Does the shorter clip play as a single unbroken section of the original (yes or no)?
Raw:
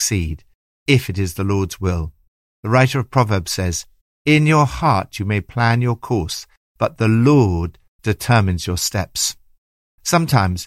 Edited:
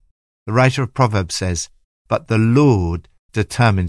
no